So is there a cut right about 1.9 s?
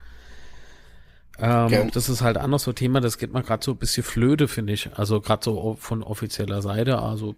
yes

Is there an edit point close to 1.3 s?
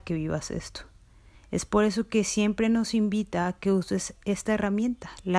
no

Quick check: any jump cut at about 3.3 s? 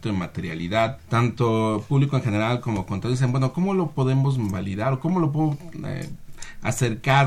no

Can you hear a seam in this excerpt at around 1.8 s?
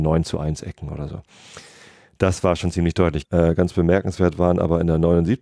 no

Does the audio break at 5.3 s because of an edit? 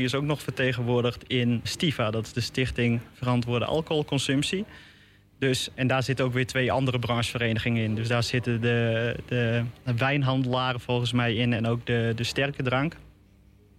no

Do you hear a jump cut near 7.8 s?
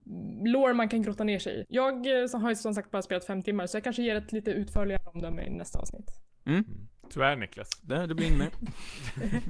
no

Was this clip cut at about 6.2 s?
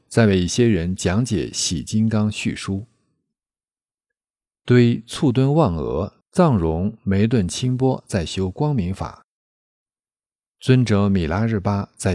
yes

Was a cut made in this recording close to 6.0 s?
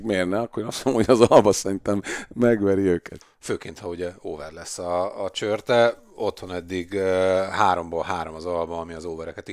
no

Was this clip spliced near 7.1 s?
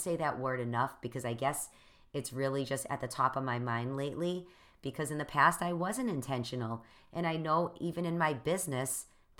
no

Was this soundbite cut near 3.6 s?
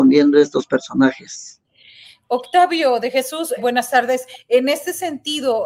yes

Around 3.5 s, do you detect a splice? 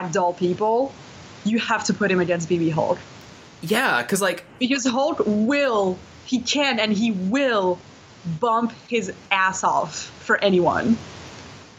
no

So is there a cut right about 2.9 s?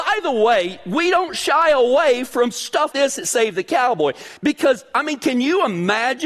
yes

